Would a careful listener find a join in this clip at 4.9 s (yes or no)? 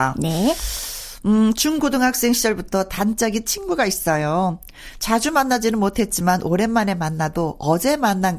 no